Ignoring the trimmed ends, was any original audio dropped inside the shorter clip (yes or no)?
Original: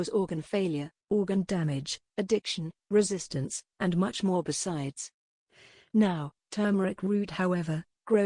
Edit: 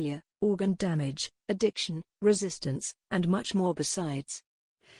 no